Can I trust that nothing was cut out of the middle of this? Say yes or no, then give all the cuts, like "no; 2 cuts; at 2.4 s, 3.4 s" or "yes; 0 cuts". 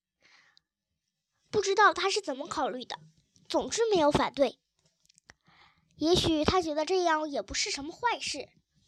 yes; 0 cuts